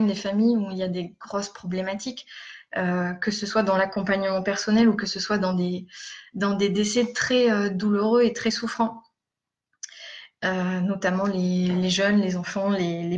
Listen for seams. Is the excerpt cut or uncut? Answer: uncut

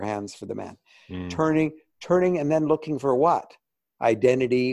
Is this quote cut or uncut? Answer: uncut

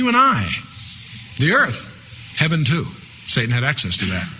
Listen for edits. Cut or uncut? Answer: uncut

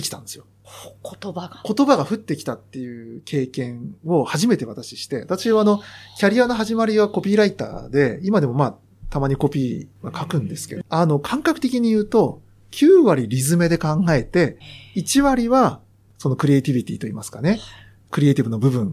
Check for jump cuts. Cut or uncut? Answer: cut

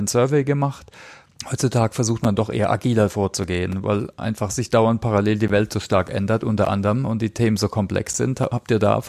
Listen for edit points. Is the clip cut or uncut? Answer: uncut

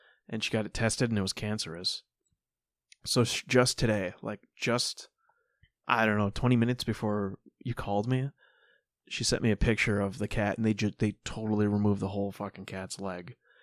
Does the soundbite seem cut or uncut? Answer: uncut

